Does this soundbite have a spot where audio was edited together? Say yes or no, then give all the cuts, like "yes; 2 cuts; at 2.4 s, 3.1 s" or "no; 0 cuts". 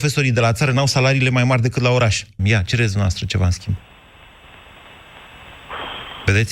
yes; 1 cut; at 2.4 s